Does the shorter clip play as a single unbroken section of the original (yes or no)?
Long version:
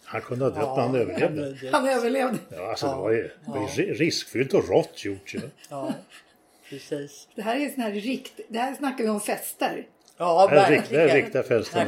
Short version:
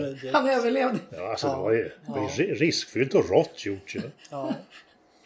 yes